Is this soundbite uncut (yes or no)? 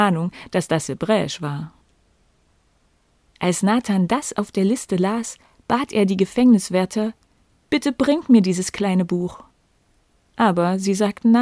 yes